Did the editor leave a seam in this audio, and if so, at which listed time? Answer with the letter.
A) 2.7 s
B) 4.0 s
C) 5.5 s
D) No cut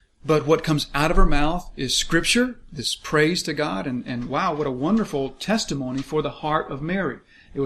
D